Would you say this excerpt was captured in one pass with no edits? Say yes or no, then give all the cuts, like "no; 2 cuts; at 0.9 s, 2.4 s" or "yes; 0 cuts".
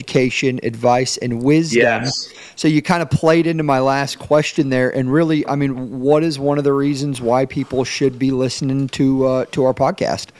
yes; 0 cuts